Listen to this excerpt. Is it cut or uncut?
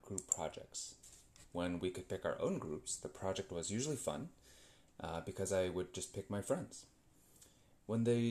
uncut